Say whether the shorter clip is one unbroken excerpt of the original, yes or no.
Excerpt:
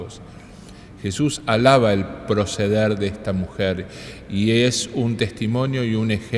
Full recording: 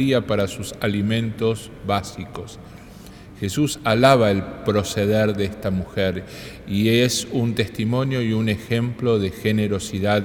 yes